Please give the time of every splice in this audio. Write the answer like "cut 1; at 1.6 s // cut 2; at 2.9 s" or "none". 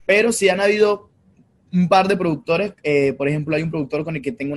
none